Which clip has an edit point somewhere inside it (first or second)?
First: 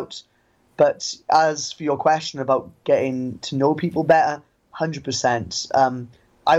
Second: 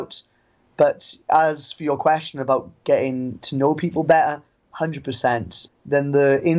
second